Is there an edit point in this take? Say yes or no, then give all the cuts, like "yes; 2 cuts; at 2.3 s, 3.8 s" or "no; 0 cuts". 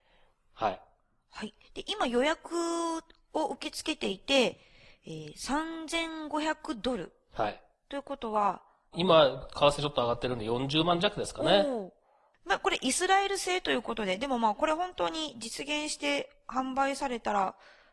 yes; 1 cut; at 8.9 s